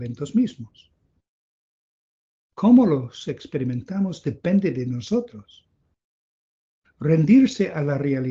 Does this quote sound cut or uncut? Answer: uncut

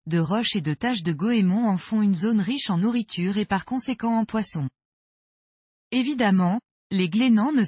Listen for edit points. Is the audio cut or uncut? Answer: uncut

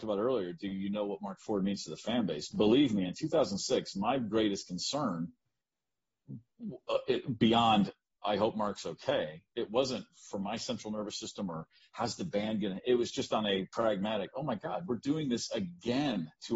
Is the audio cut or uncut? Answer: uncut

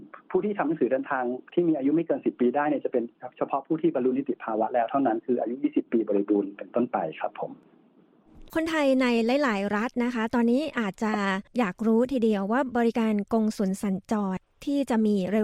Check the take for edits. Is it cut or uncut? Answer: cut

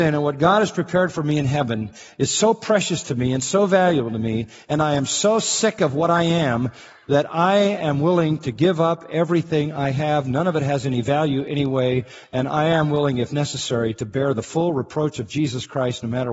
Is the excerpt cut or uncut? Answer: uncut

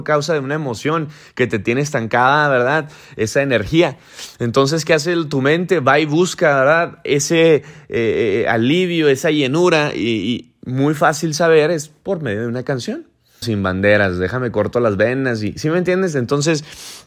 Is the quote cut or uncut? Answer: cut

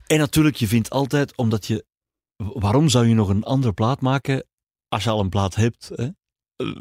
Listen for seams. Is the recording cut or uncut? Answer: uncut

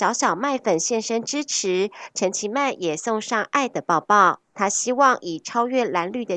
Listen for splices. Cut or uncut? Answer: cut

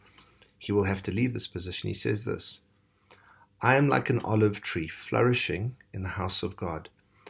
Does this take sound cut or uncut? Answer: uncut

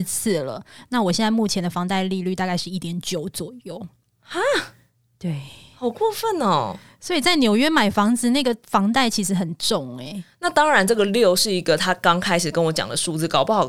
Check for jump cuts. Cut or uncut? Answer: uncut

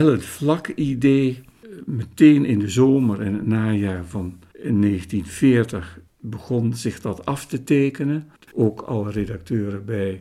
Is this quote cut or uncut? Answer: cut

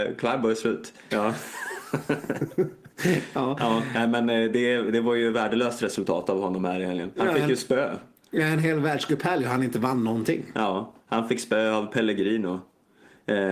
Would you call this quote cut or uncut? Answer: cut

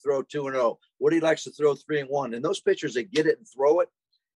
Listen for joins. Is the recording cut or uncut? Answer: uncut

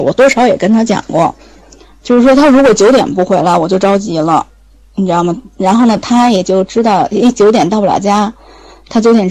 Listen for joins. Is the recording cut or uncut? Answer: uncut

